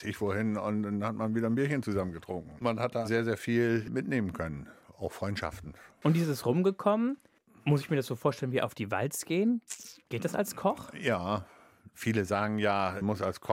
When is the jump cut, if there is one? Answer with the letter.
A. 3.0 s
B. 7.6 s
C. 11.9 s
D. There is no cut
A